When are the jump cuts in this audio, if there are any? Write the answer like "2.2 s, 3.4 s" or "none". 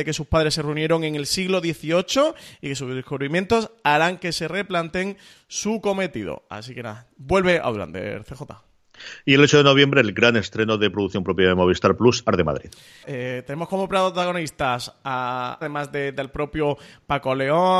13.0 s, 15.6 s